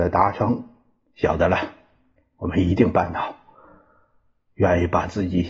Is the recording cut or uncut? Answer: uncut